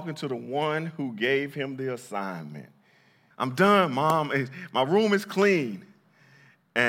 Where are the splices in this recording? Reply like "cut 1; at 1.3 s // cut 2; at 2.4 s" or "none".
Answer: cut 1; at 3.3 s